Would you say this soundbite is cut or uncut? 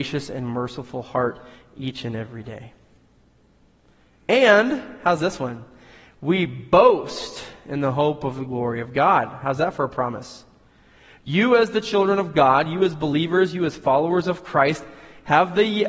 uncut